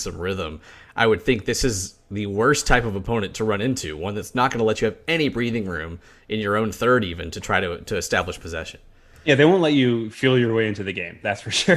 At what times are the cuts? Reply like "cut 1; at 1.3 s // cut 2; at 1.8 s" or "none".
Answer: none